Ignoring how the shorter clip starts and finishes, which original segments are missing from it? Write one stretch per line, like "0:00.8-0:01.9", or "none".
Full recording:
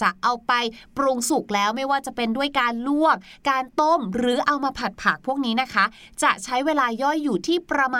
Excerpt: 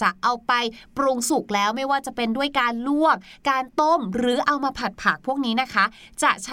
none